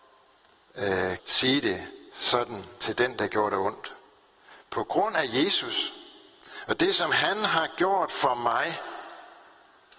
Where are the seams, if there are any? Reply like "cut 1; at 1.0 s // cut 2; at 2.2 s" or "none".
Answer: cut 1; at 1.2 s